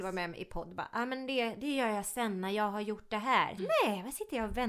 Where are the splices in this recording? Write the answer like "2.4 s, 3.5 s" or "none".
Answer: 3.6 s